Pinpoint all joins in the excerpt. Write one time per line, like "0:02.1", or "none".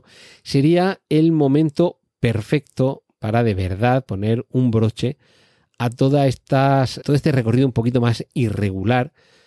0:07.0

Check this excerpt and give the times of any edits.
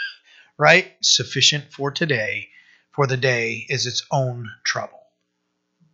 0:01.0

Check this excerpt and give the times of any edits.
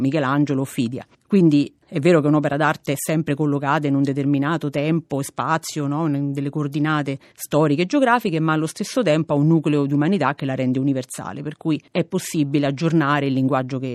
none

